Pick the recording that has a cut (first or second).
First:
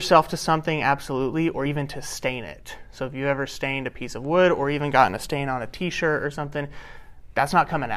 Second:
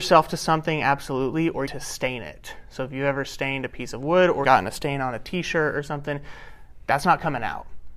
second